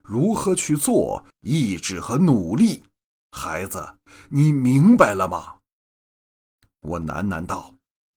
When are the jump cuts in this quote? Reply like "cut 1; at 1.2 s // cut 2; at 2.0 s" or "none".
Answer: cut 1; at 1.3 s